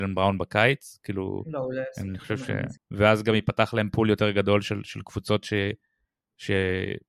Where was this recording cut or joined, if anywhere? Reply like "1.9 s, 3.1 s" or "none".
2.8 s